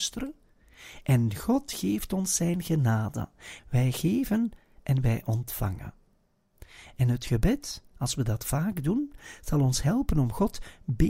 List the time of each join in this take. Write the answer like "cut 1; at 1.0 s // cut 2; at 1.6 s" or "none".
cut 1; at 3.6 s